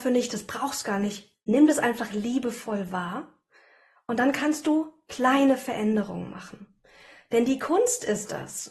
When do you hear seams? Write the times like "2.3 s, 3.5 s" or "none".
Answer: none